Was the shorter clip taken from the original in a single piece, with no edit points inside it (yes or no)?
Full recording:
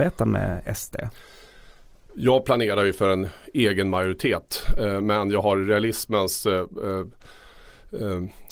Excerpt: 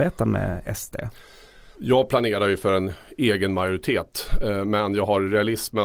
no